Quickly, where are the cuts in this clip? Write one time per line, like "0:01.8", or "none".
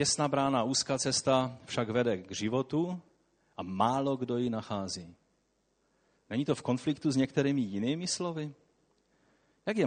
none